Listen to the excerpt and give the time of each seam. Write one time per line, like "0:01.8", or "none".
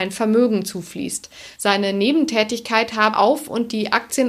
0:01.6
0:03.1